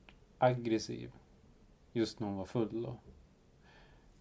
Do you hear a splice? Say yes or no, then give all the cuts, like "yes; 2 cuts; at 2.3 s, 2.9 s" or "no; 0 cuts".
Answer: no; 0 cuts